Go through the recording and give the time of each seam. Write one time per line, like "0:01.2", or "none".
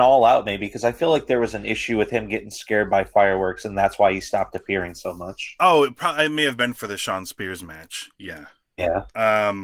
0:05.6